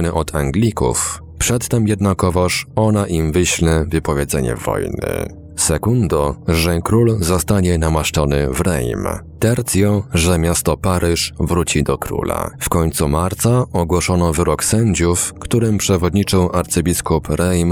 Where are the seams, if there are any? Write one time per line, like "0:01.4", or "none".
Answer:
0:12.5